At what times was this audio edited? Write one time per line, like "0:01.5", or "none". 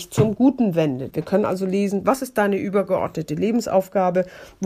0:01.1